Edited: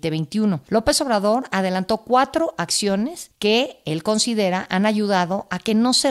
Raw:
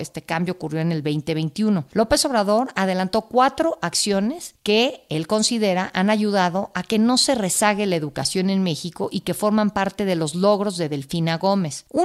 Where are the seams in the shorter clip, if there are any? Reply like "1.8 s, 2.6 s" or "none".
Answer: none